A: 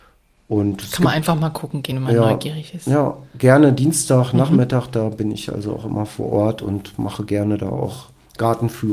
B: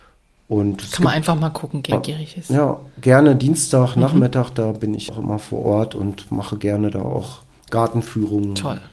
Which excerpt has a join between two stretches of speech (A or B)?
B